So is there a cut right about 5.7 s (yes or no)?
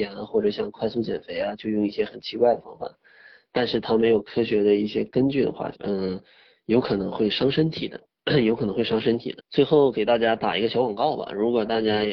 yes